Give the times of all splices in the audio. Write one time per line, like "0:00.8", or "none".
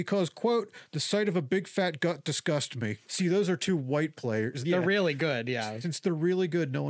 0:03.0
0:04.6